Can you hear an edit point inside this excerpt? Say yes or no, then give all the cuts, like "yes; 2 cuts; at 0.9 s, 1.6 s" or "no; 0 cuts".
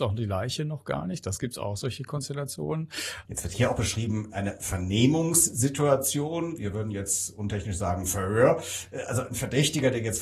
yes; 1 cut; at 3.2 s